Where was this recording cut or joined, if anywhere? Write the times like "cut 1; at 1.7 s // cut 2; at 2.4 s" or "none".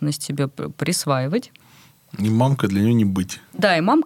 none